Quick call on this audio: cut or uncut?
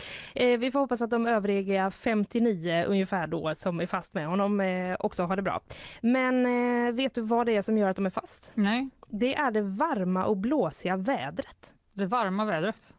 uncut